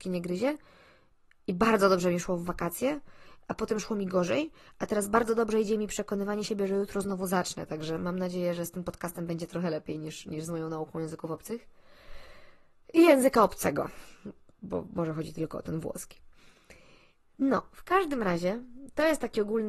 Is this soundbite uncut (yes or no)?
yes